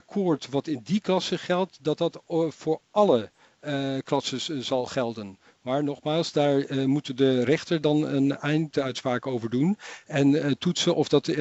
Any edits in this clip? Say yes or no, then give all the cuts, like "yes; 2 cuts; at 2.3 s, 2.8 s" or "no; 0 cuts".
no; 0 cuts